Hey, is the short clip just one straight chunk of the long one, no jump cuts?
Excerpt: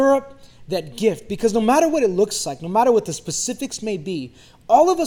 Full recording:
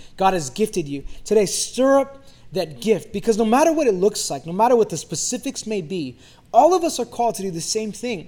yes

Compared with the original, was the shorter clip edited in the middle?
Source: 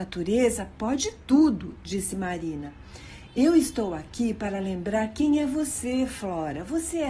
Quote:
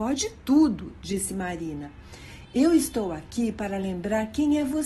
no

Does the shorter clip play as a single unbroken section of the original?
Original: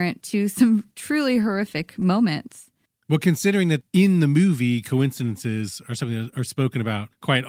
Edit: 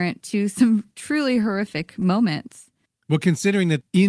yes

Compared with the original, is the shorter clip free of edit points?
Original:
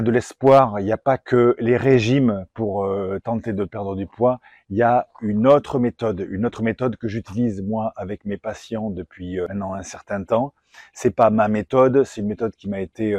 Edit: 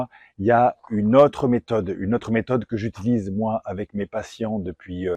yes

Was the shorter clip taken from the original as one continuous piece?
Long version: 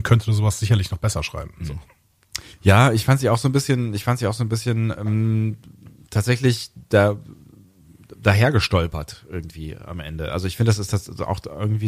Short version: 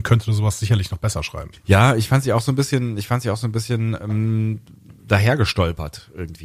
no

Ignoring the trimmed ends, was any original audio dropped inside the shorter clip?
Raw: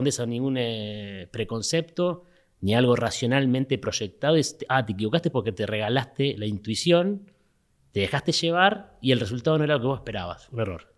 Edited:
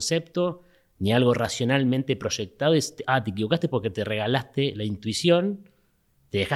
no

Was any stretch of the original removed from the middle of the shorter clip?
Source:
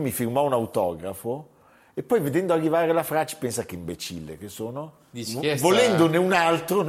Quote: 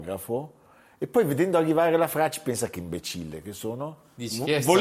no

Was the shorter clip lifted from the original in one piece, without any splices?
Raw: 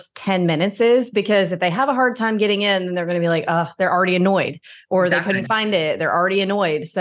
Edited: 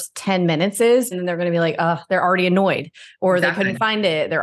no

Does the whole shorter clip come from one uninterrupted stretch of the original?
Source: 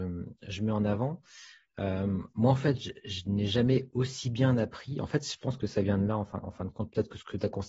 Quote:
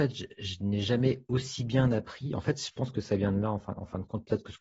yes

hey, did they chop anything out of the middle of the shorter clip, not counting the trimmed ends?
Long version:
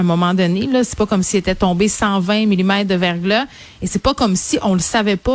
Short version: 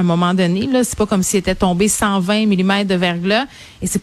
no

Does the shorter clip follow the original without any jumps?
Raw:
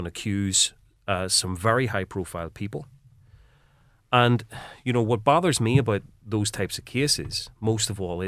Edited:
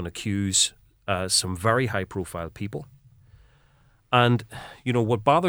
yes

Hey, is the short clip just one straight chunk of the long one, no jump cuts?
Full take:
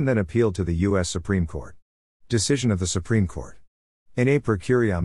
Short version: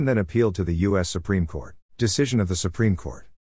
no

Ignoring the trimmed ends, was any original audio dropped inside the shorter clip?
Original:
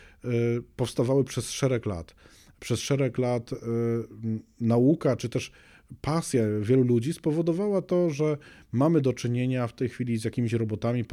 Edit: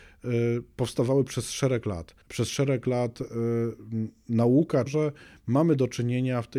yes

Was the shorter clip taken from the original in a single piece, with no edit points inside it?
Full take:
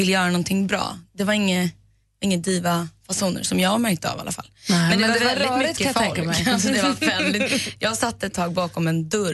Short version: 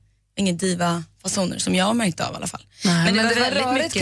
yes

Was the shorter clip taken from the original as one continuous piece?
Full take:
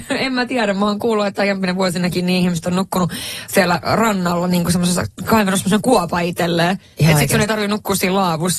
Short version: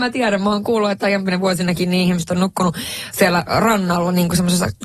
yes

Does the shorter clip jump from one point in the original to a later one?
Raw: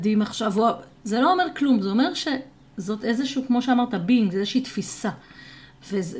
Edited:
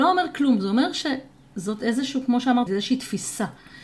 yes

